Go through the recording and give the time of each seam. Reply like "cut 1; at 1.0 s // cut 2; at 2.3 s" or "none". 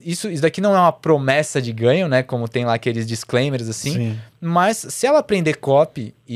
none